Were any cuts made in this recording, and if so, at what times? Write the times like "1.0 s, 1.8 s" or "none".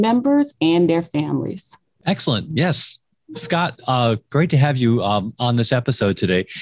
none